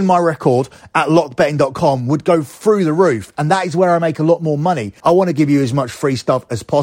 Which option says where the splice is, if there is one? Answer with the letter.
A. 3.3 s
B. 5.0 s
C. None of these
B